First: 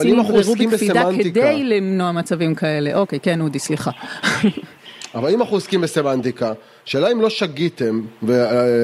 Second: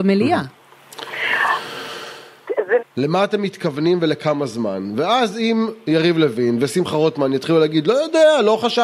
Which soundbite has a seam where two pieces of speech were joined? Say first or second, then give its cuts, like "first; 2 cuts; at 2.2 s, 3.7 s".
second; 1 cut; at 2.8 s